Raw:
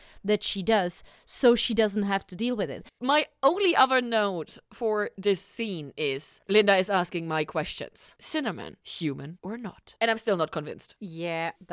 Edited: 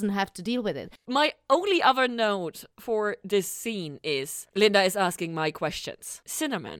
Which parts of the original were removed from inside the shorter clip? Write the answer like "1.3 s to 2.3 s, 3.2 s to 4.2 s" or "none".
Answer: none